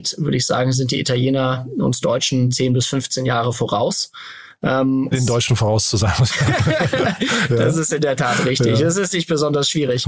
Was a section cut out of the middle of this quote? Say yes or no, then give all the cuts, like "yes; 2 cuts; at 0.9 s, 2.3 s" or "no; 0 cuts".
yes; 1 cut; at 5.1 s